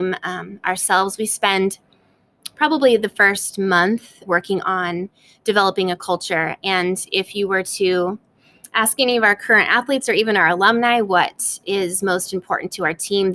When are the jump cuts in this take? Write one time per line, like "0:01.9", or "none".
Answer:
0:04.3

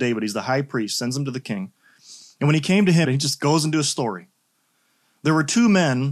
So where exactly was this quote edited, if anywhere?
0:03.0

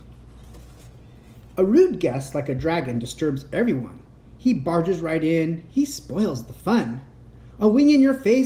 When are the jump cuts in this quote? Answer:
none

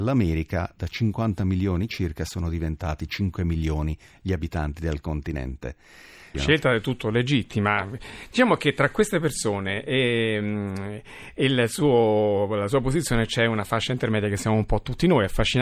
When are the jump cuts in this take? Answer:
0:06.3

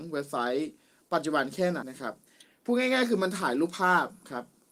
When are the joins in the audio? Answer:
0:01.8

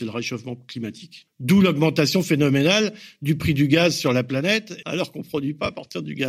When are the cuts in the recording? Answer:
0:01.3
0:04.8

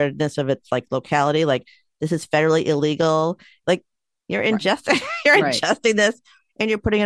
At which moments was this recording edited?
0:03.6

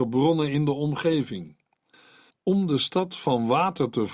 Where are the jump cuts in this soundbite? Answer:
0:02.3

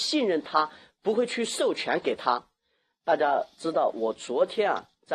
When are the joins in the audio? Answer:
none

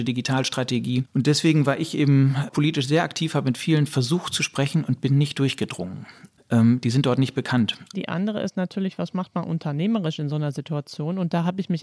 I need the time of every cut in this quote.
0:06.3
0:07.9

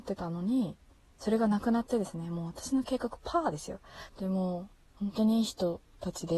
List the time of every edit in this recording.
0:04.1

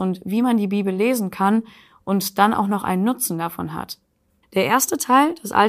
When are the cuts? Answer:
0:04.4

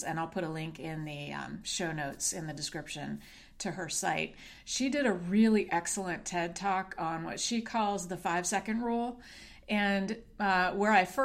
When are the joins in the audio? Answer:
none

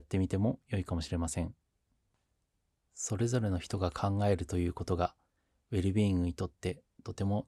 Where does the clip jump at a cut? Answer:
none

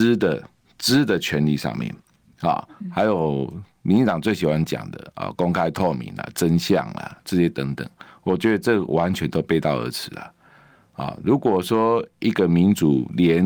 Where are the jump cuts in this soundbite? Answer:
none

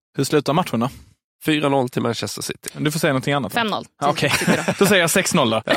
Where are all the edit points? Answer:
0:02.7

